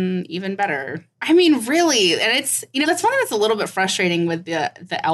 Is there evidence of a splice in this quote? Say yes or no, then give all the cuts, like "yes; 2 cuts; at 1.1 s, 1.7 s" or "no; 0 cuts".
yes; 2 cuts; at 1.1 s, 2.8 s